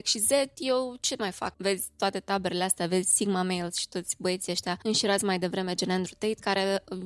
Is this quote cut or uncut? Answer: cut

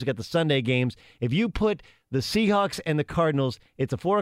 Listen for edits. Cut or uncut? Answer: uncut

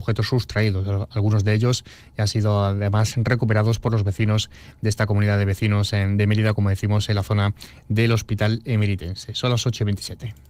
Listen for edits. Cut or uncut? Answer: uncut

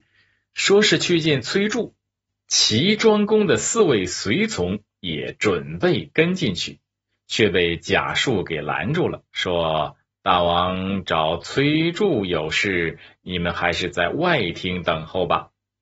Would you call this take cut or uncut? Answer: uncut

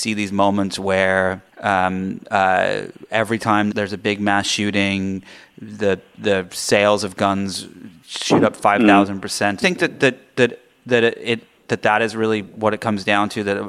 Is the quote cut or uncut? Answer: cut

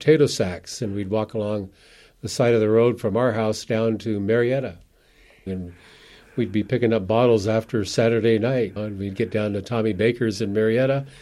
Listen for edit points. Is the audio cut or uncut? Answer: cut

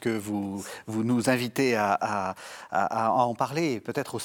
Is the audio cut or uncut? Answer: uncut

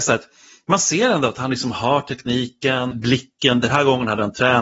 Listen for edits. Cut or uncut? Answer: cut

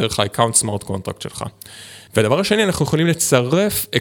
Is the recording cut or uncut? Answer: cut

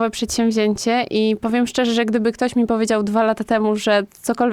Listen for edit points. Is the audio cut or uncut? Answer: uncut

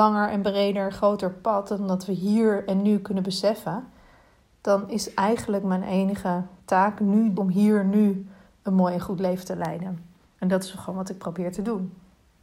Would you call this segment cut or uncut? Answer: cut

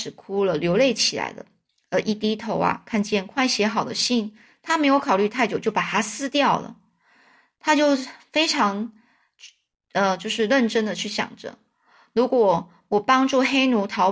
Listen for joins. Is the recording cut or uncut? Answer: uncut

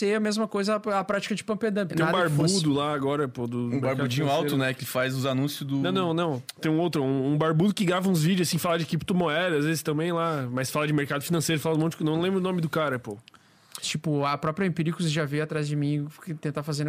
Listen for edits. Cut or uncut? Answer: cut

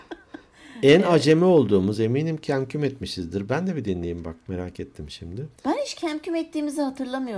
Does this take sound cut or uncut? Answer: cut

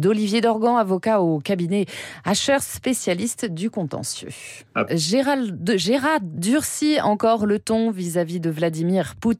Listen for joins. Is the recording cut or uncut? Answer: cut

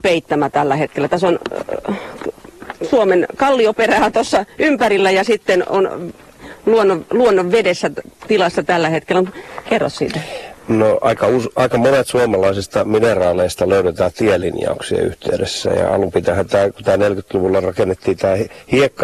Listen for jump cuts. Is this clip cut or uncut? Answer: cut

